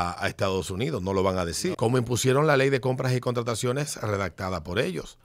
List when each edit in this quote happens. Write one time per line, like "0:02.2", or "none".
0:01.7